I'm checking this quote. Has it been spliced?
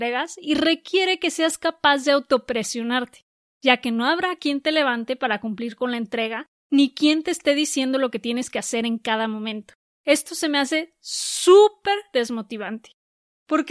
yes; 1 cut; at 9.8 s

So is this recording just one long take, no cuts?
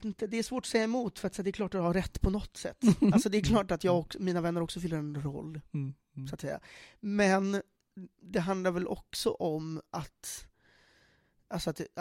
yes; 0 cuts

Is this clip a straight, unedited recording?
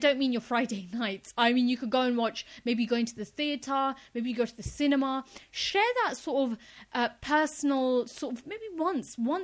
yes; 0 cuts

